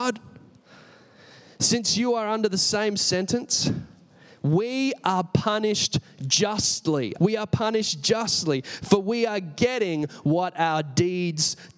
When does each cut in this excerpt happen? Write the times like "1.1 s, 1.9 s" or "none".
7.2 s